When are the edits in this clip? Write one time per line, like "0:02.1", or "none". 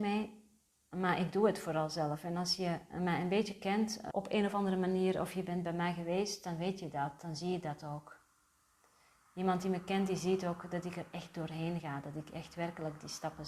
0:04.1